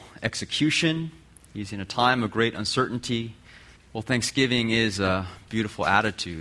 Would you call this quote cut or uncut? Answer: cut